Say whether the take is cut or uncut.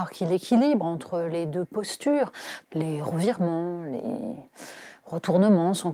cut